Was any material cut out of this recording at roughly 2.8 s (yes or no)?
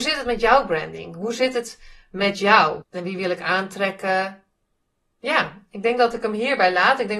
yes